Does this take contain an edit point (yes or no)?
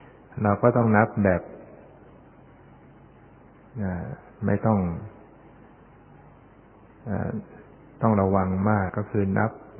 yes